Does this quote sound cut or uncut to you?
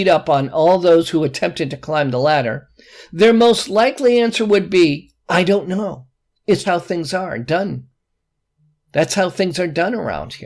cut